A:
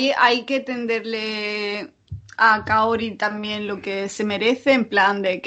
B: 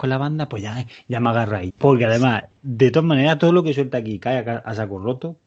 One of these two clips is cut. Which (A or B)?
B